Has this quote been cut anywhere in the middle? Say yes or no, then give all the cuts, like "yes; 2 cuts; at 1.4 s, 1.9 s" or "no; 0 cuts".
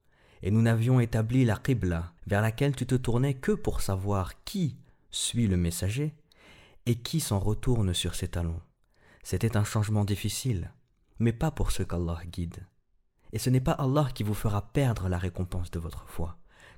yes; 1 cut; at 2.2 s